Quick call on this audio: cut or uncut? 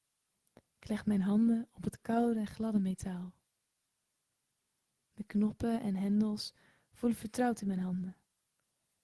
uncut